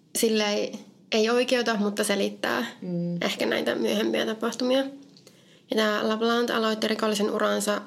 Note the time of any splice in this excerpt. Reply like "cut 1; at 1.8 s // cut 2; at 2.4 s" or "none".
none